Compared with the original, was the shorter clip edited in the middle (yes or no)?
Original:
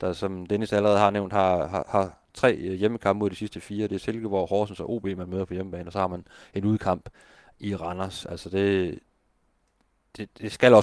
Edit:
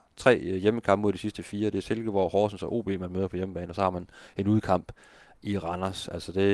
no